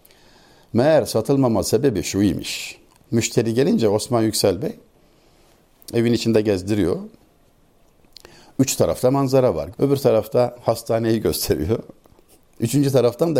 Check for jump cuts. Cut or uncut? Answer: cut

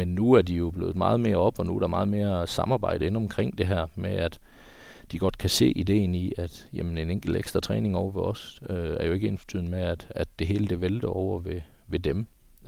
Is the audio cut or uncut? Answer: uncut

